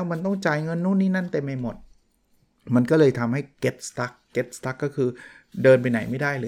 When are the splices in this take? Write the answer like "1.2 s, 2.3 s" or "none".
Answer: none